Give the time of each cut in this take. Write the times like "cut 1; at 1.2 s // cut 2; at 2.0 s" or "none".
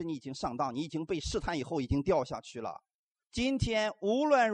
cut 1; at 3.2 s